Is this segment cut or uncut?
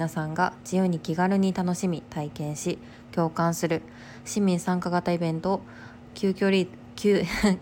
uncut